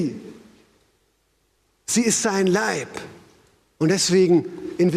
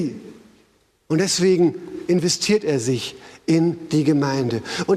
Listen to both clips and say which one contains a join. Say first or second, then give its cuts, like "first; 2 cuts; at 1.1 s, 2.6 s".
second; 1 cut; at 1.0 s